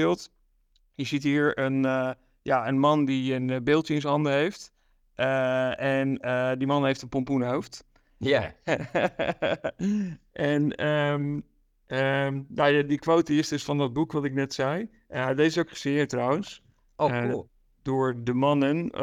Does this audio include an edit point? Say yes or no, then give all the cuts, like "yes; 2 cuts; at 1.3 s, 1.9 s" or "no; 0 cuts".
no; 0 cuts